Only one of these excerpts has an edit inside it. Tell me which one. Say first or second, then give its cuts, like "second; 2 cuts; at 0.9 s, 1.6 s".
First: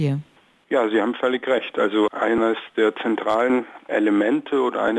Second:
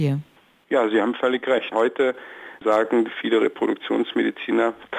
second; 1 cut; at 1.7 s